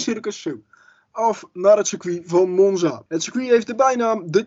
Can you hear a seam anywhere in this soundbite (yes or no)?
yes